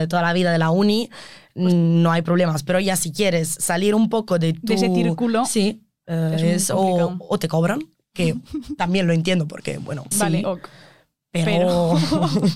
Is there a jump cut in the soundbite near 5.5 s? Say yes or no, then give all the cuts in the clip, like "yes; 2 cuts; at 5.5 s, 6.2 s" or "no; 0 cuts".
no; 1 cut; at 10.1 s